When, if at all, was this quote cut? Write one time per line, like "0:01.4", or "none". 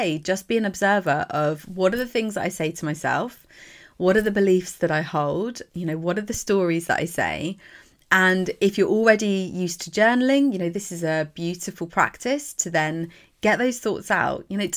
none